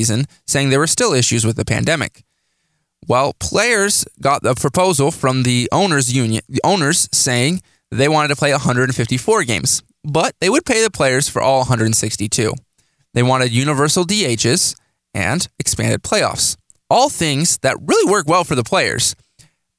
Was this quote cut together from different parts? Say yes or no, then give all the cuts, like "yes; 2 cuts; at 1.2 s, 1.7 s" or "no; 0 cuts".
no; 0 cuts